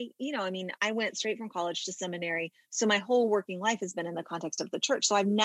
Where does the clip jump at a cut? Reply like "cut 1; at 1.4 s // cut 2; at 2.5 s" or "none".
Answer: none